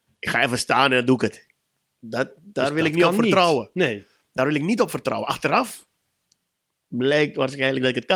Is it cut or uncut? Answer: uncut